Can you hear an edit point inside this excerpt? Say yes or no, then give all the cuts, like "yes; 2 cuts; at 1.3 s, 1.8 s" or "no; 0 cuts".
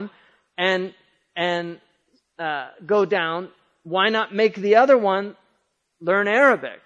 no; 0 cuts